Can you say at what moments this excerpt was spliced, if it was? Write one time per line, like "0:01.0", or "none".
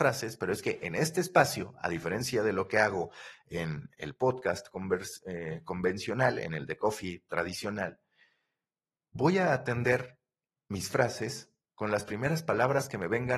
none

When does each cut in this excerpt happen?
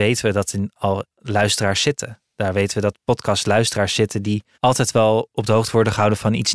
0:04.5

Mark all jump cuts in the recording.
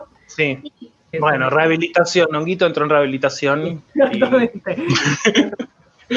0:01.1

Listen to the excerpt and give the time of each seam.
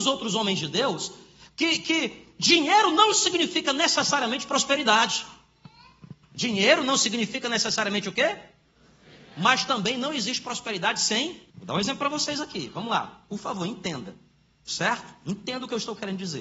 0:11.5

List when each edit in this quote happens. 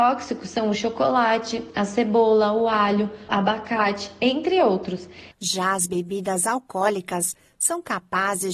0:03.3
0:05.3

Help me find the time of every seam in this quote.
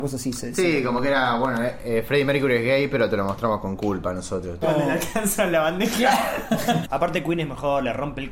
0:04.6
0:06.8

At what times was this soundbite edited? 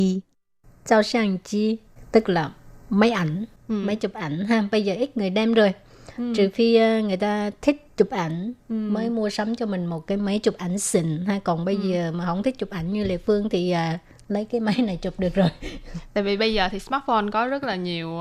none

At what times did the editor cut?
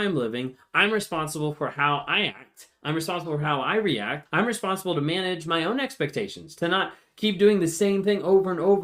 0:04.3

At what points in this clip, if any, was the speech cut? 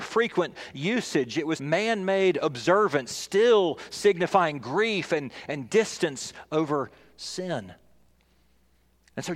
0:01.6

